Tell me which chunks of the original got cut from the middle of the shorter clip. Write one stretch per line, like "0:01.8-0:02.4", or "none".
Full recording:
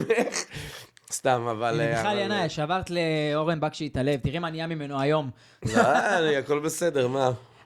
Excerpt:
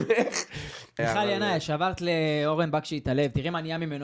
0:01.0-0:01.9